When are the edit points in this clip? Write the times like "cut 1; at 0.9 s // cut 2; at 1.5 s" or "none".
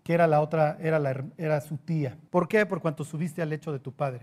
cut 1; at 2.3 s